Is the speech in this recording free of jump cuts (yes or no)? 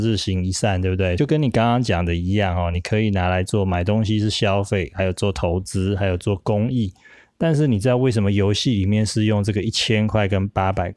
yes